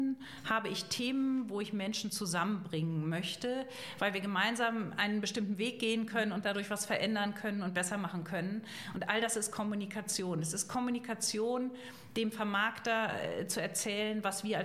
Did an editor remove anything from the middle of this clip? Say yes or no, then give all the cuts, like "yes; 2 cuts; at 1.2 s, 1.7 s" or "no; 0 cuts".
no; 0 cuts